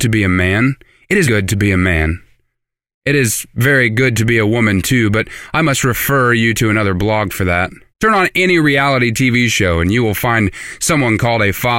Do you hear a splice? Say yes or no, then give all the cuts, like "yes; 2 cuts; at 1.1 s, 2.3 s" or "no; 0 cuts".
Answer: yes; 2 cuts; at 1.2 s, 7.9 s